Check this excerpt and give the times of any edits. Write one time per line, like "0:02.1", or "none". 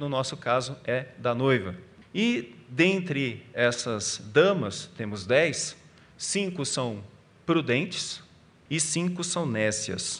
0:02.0
0:08.7